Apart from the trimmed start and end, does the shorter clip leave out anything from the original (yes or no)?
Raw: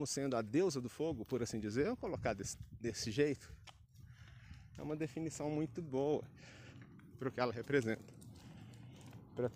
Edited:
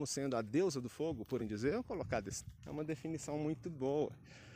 yes